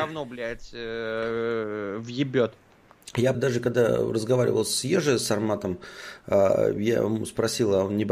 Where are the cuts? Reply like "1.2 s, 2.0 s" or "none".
3.3 s